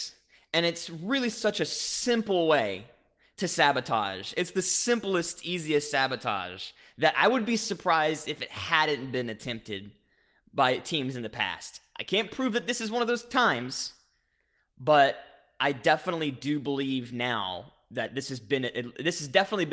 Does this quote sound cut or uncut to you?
uncut